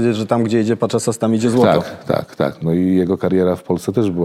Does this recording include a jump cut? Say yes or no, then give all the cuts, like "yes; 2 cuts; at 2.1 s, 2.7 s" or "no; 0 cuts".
yes; 1 cut; at 2.6 s